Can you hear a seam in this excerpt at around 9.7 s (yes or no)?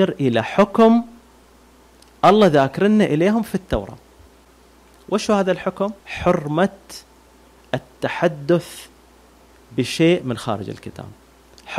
no